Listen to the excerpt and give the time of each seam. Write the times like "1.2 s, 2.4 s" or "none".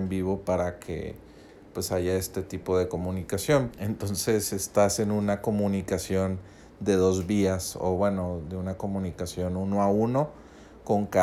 3.7 s